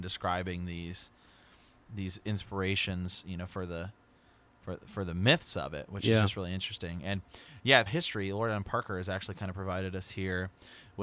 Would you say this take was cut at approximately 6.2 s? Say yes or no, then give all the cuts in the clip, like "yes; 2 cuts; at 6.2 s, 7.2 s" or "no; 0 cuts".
no; 1 cut; at 7.9 s